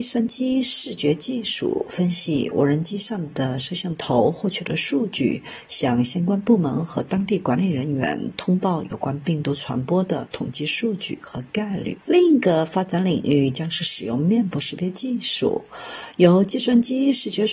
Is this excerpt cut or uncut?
cut